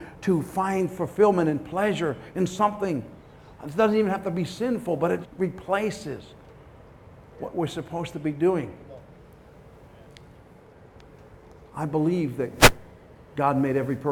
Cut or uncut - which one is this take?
cut